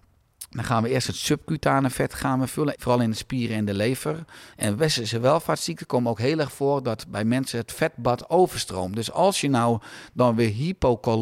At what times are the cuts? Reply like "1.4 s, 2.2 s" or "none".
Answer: 2.8 s, 4.5 s